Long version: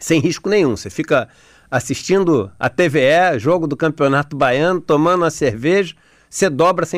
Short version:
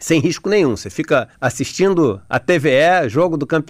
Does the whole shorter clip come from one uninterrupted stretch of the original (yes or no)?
no